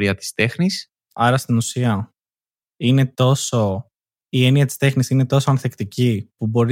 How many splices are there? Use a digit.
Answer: 1